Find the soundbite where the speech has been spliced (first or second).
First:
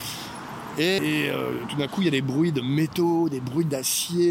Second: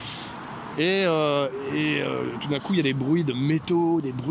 first